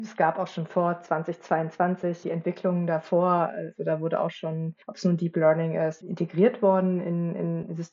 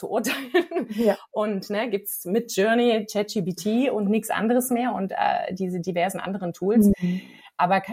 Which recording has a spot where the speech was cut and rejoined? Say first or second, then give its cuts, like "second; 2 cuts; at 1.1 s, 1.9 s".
first; 3 cuts; at 2.2 s, 4.8 s, 6.0 s